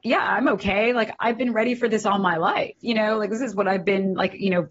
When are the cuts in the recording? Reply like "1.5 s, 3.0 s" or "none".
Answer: none